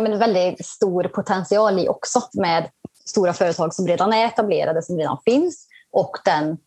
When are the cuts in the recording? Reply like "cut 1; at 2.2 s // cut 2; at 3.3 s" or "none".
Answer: cut 1; at 2.3 s